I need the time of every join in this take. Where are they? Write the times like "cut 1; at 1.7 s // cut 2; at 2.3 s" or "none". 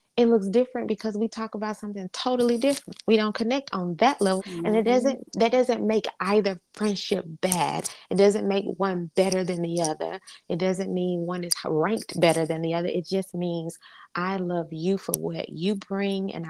cut 1; at 4.4 s